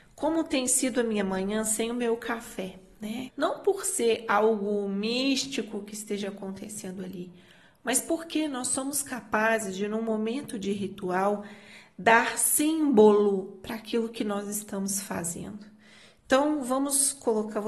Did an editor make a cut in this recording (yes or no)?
yes